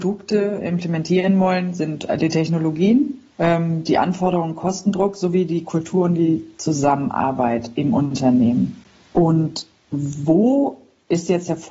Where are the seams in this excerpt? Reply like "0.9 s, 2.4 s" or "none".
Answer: 3.3 s